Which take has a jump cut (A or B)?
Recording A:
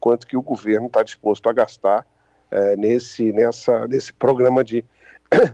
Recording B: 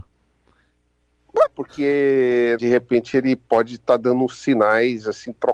B